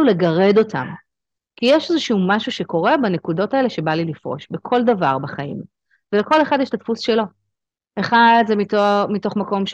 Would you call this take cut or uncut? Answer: uncut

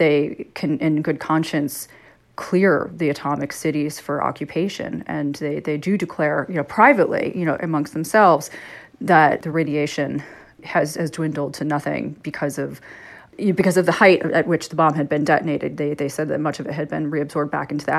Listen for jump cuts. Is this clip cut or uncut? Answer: uncut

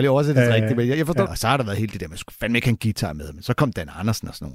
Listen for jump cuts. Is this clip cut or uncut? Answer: cut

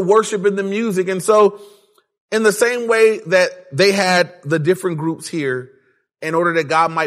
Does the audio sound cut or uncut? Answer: uncut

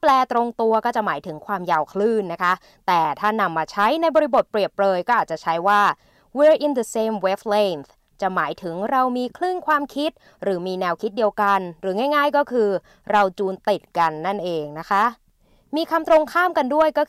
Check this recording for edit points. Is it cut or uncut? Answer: uncut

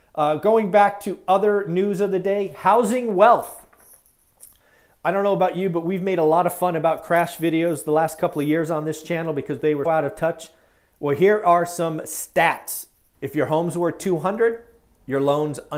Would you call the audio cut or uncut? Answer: cut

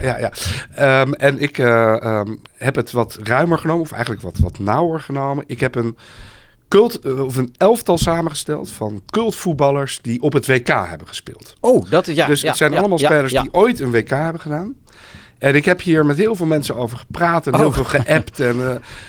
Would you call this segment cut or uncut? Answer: uncut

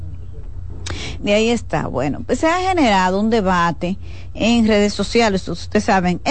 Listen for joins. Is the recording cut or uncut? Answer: cut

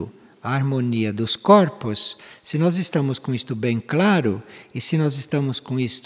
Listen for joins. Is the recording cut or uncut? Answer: uncut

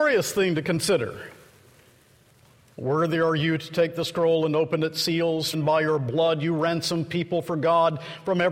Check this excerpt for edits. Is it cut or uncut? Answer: cut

